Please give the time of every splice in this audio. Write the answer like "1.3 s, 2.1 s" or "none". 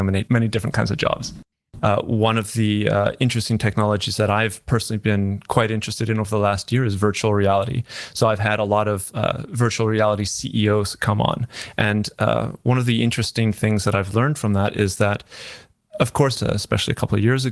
1.8 s, 16.3 s